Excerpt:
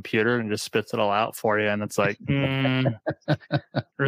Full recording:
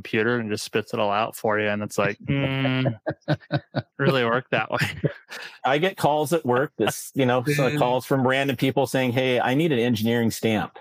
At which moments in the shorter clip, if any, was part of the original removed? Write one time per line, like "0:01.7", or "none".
none